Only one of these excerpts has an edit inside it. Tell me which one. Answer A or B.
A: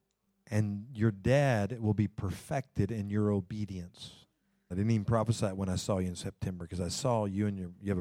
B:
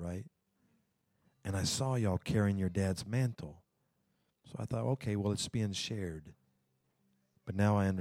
A